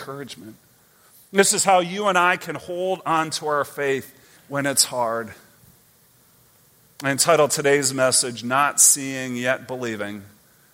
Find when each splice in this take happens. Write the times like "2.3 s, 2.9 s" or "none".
4.4 s